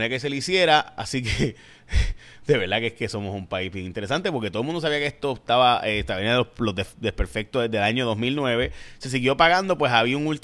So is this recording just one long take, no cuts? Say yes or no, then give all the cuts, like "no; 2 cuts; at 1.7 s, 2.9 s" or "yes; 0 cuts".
yes; 0 cuts